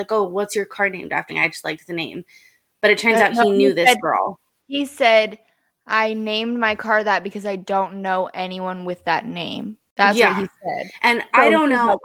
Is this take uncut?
no; 1 cut; at 1.3 s

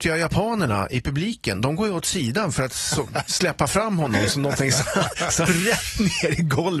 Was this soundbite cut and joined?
yes; 1 cut; at 5.5 s

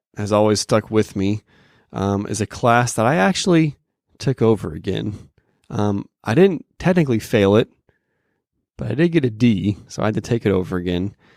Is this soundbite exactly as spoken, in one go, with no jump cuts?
yes; 0 cuts

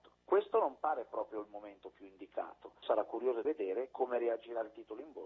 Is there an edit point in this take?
no; 0 cuts

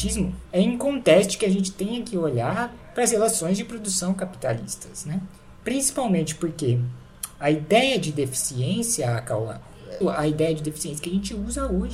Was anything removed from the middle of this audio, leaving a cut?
yes; 1 cut; at 10.0 s

